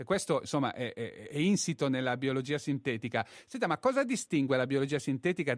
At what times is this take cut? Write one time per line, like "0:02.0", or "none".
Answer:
none